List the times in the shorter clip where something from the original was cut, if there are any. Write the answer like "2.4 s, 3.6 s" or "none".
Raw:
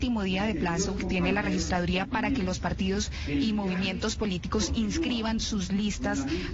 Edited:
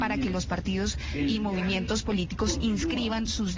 none